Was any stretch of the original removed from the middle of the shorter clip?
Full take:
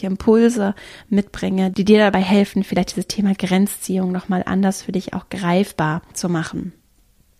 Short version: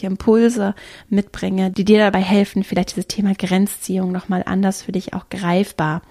no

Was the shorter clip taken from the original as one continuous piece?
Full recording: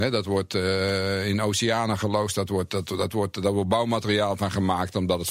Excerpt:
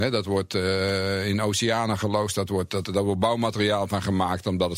no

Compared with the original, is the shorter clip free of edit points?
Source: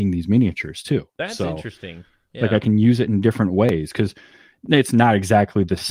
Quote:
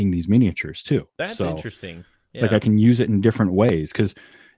yes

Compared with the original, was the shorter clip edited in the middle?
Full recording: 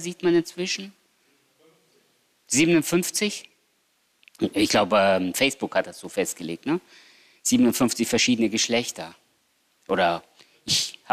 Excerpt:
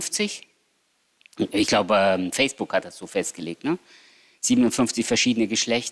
no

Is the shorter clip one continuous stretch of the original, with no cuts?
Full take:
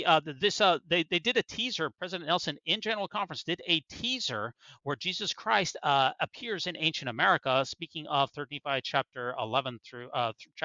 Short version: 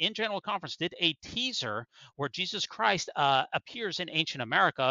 yes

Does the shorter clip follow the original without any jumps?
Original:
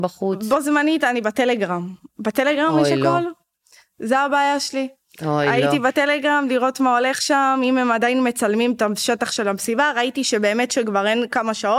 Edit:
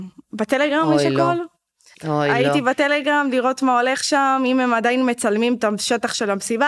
no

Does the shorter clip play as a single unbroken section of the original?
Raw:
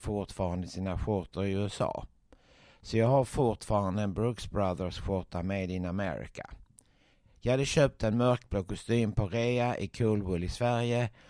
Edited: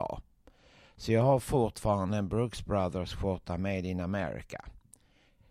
yes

